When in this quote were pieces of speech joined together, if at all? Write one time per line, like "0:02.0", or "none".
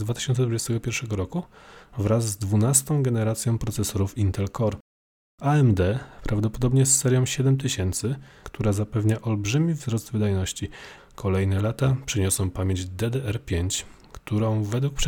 0:08.4
0:11.0